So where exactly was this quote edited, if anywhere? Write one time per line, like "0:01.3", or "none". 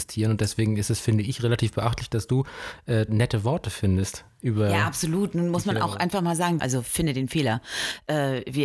0:03.1
0:06.6